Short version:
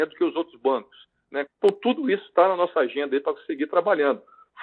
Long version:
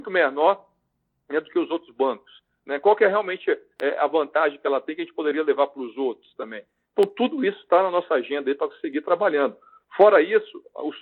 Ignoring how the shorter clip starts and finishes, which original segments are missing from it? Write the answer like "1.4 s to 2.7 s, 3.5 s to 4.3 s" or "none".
2.8 s to 6.8 s